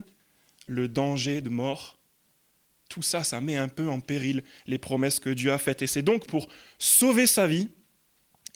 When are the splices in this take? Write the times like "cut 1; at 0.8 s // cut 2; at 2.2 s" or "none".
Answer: none